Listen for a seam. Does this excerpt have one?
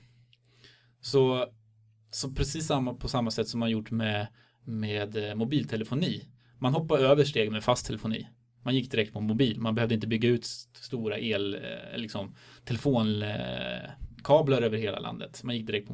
no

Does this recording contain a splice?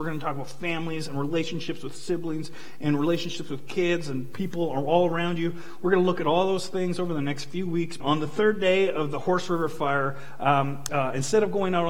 yes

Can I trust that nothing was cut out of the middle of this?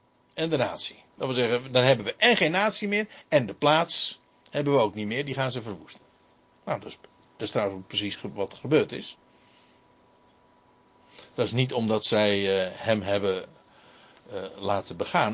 yes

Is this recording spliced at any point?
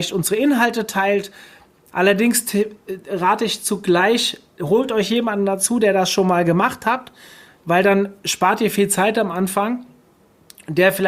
yes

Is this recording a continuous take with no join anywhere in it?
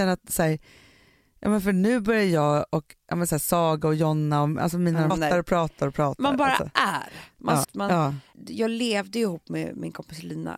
no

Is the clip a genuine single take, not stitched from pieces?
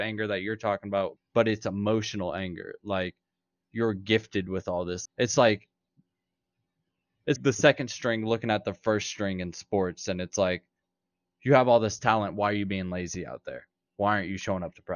no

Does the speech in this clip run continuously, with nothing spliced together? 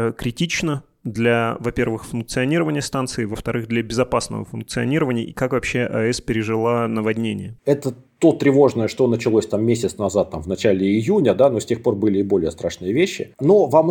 yes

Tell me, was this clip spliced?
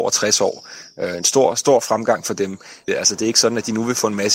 yes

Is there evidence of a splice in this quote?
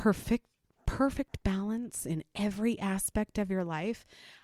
no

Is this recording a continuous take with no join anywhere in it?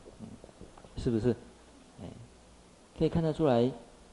no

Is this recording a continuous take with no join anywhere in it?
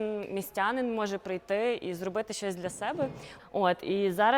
no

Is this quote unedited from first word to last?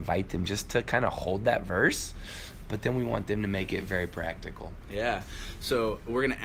yes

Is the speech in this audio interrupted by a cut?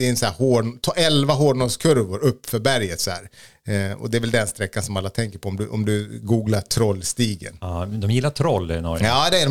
no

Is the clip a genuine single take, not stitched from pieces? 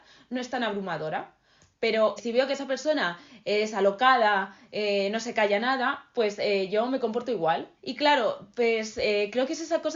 no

